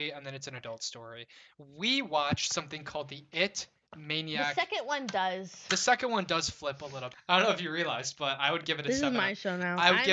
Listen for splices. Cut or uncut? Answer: cut